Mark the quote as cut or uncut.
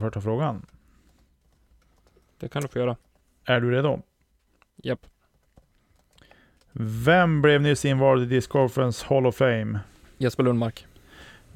uncut